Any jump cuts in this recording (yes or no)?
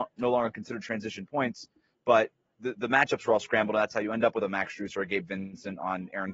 no